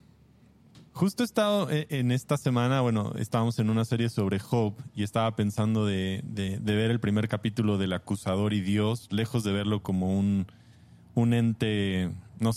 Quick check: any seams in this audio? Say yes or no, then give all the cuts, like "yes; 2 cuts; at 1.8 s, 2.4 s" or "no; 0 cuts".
no; 0 cuts